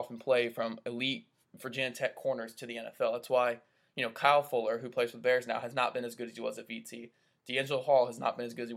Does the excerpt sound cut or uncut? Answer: uncut